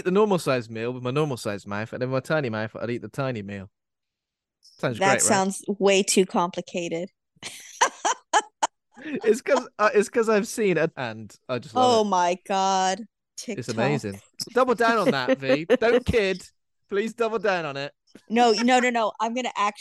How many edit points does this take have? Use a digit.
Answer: 2